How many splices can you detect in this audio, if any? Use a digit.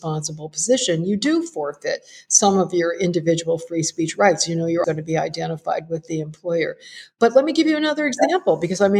1